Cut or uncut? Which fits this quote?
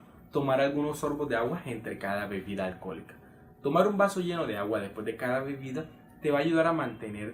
uncut